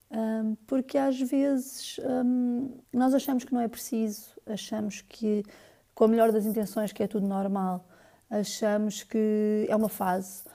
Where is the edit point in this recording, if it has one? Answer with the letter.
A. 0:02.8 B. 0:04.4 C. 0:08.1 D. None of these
A